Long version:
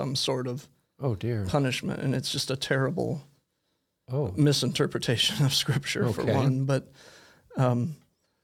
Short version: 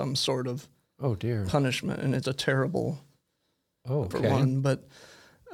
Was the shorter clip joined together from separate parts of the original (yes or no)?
yes